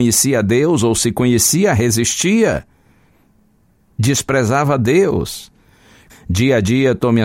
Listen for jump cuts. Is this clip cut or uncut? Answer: cut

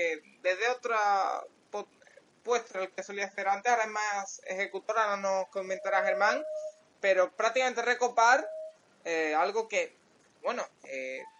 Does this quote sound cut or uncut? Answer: uncut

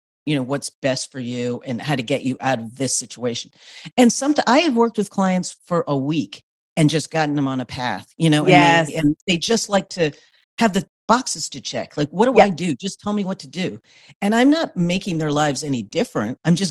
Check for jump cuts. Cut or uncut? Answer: uncut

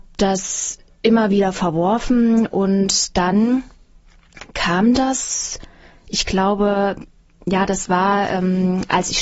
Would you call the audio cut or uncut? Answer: uncut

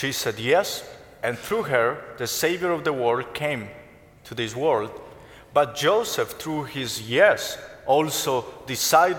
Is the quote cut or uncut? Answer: uncut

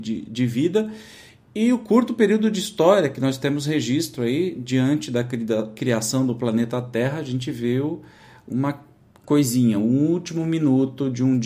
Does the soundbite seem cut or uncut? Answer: uncut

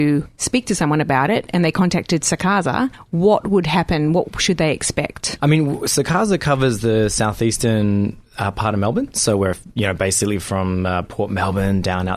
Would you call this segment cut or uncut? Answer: cut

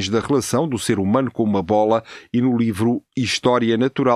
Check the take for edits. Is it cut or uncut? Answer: uncut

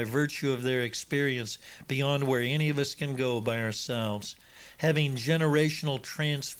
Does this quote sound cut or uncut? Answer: uncut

